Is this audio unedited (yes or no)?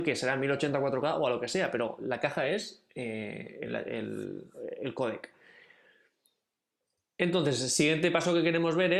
yes